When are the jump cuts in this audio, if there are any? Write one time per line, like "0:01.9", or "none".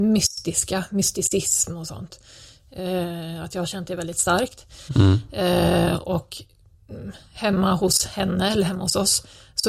0:04.9